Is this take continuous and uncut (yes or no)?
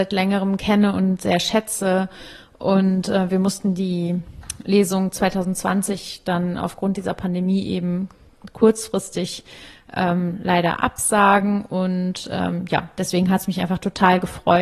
yes